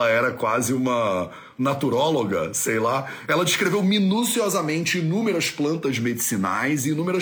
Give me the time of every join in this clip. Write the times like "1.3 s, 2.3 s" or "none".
none